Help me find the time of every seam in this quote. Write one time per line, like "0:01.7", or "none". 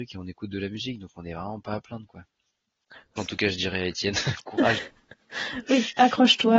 0:03.2